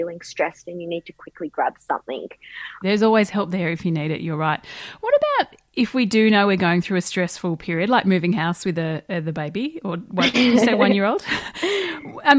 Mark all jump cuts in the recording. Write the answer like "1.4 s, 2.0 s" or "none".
2.8 s